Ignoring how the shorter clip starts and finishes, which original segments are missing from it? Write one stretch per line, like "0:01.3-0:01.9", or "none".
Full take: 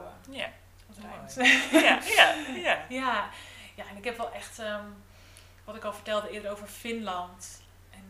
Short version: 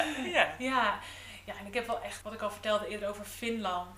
0:04.5-0:05.6